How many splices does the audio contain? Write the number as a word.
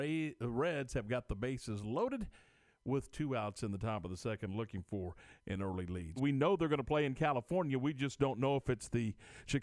one